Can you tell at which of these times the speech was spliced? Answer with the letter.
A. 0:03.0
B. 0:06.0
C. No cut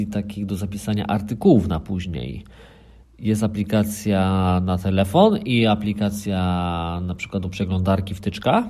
A